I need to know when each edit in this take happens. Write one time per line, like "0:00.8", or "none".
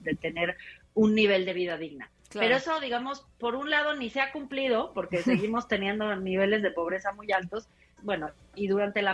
0:08.0